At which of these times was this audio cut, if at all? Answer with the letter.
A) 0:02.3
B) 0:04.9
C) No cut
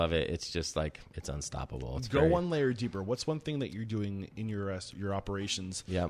B